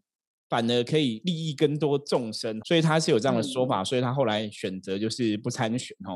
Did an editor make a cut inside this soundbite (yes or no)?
yes